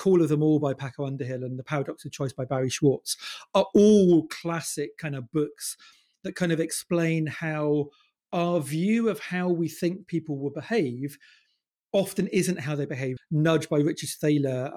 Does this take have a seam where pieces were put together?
yes; 1 cut; at 13.2 s

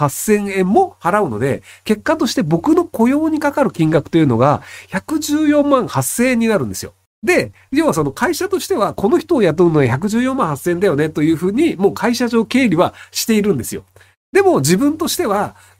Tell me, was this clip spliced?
no; 0 cuts

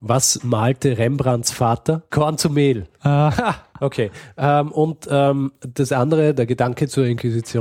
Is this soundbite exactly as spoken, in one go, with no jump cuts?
no; 1 cut; at 2.1 s

